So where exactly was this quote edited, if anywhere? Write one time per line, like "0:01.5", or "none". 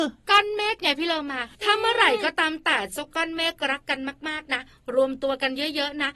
0:01.5